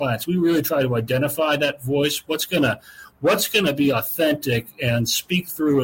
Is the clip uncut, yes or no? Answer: yes